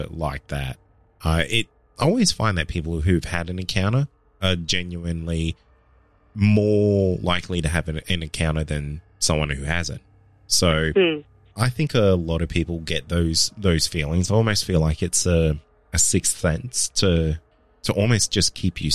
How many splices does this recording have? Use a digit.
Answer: 1